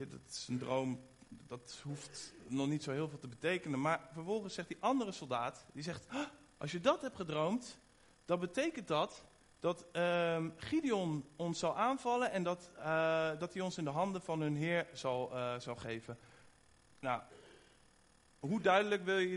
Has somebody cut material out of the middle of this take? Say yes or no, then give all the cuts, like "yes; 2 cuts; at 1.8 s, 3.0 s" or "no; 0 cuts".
no; 0 cuts